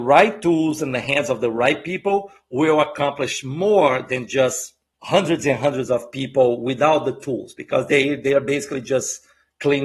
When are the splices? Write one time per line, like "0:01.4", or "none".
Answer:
none